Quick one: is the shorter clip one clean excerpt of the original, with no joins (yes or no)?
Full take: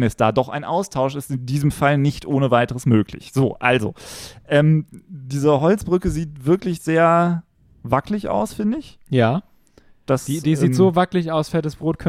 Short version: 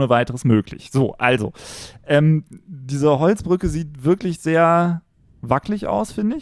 yes